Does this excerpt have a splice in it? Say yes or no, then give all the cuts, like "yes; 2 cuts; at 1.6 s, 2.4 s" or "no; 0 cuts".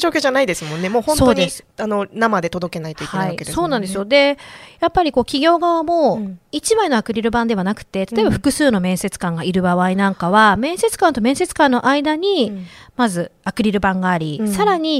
no; 0 cuts